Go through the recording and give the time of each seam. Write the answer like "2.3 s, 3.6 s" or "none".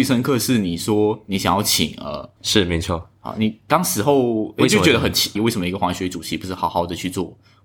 2.4 s, 5.4 s

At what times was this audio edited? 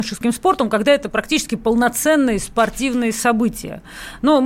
none

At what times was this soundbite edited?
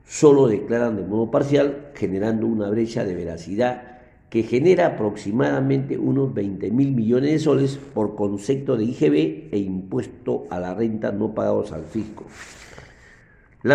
none

